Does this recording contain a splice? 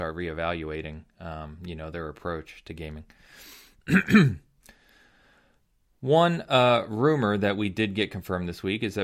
no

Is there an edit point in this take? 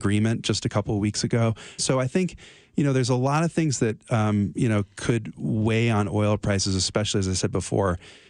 yes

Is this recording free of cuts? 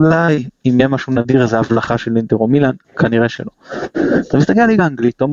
yes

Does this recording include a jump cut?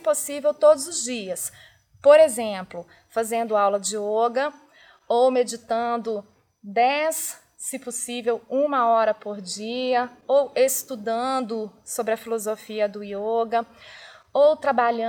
no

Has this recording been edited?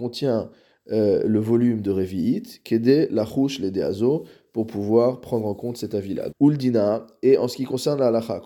yes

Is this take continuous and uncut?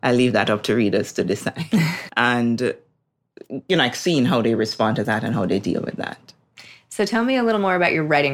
no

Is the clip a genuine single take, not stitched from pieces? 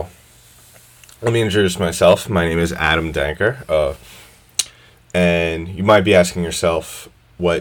yes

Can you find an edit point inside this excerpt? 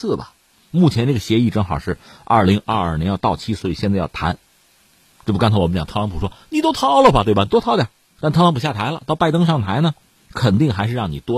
no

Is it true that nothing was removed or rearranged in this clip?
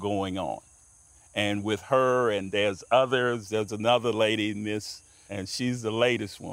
no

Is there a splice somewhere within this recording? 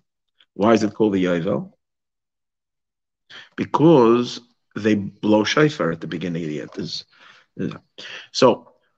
yes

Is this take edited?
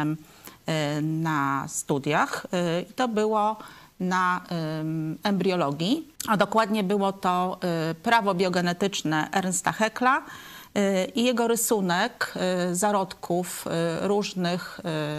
yes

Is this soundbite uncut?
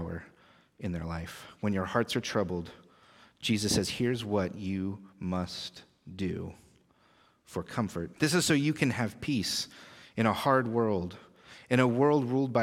no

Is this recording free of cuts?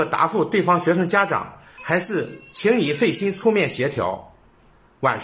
no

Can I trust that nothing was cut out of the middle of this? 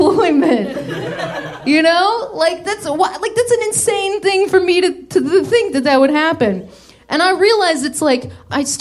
yes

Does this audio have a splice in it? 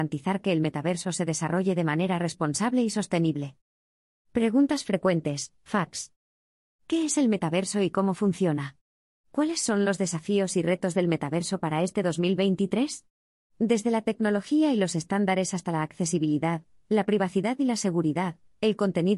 yes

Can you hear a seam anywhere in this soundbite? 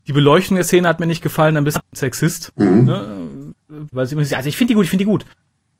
yes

